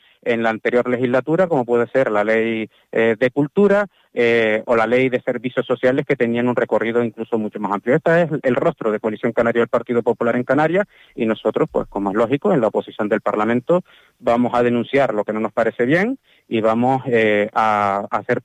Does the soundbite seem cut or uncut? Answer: uncut